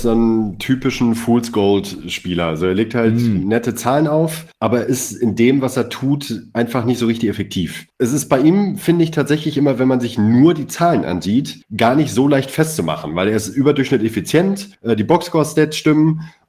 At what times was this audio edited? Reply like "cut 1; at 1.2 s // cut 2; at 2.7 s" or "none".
none